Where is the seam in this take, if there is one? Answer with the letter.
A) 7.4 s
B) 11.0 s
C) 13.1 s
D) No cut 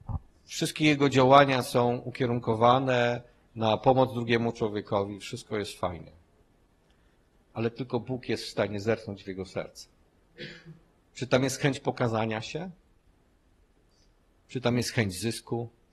D